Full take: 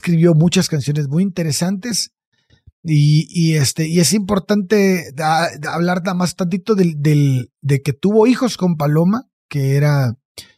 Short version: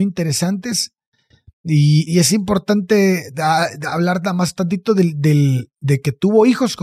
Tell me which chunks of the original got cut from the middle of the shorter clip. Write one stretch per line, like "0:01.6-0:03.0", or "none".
0:03.3-0:03.9